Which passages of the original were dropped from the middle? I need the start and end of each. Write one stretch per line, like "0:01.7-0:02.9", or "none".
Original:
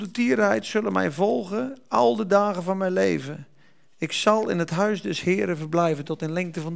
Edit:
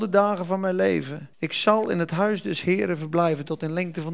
0:03.5-0:03.9